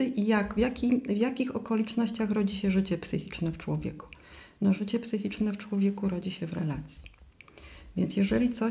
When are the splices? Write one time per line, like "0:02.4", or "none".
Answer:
none